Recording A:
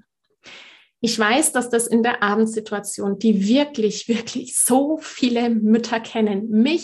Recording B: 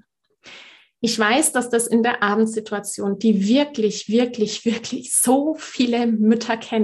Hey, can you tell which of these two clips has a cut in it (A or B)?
A